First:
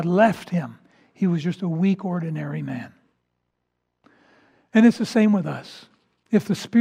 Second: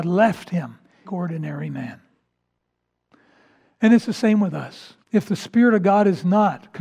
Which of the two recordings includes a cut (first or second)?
second